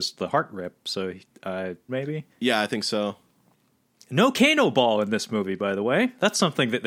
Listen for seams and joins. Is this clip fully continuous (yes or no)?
no